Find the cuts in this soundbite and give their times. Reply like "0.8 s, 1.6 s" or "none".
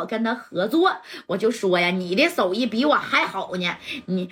none